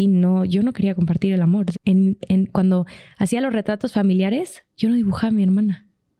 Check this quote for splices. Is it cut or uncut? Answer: cut